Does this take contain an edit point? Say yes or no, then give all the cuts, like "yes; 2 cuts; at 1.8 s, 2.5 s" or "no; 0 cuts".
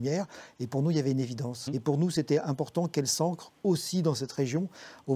yes; 1 cut; at 1.7 s